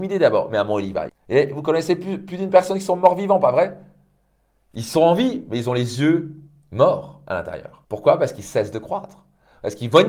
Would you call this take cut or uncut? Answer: cut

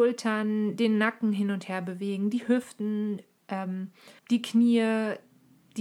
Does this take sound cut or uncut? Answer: cut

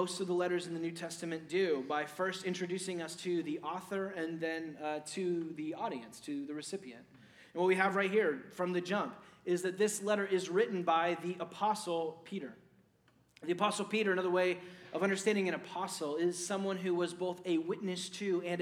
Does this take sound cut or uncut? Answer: uncut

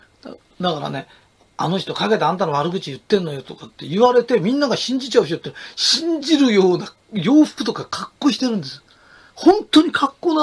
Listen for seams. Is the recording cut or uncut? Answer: uncut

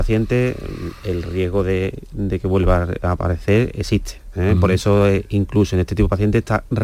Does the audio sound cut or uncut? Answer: uncut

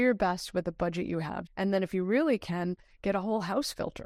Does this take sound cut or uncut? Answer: cut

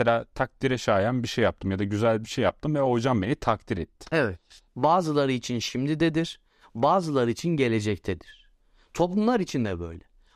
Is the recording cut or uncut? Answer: cut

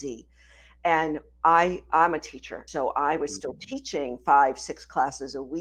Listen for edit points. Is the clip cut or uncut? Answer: cut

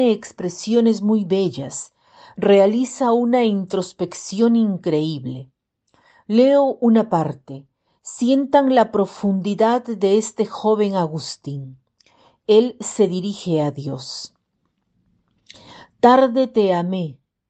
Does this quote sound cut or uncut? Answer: uncut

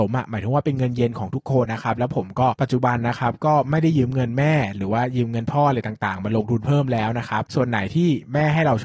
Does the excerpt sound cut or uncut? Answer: cut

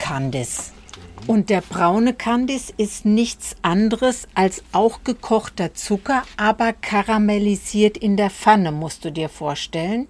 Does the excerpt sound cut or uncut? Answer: uncut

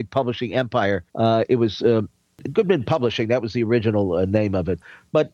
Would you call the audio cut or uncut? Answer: cut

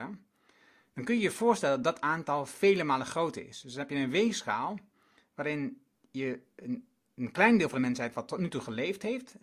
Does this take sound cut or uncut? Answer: cut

